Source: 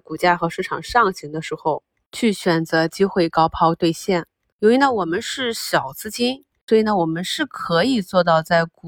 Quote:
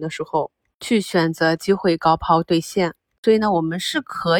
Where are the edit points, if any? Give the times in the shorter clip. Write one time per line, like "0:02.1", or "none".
0:03.2